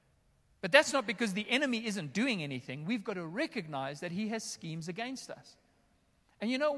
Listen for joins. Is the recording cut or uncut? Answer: uncut